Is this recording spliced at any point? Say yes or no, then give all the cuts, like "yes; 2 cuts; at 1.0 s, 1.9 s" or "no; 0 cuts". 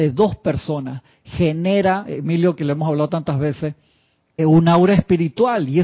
yes; 1 cut; at 4.4 s